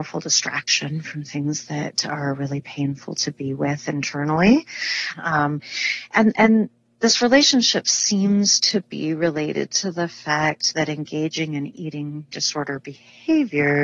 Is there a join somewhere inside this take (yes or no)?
yes